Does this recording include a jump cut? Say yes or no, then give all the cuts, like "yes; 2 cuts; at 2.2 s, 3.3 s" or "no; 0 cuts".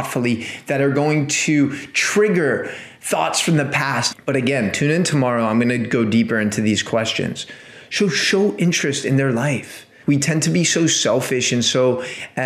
yes; 2 cuts; at 4.1 s, 10.0 s